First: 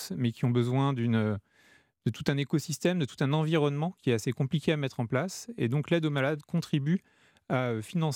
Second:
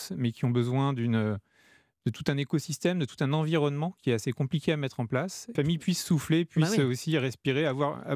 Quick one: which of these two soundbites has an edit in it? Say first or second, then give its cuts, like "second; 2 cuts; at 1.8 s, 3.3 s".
second; 1 cut; at 5.6 s